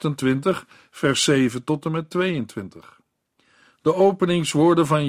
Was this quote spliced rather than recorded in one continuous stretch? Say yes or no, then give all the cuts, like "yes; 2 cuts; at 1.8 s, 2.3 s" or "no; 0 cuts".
no; 0 cuts